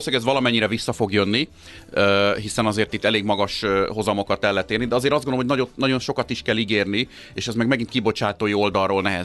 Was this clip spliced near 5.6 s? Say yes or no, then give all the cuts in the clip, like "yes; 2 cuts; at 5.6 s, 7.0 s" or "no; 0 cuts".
no; 0 cuts